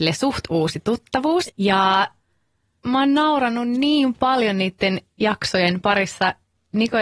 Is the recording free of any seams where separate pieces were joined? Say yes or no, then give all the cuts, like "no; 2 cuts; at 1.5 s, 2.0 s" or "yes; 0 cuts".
no; 1 cut; at 1.5 s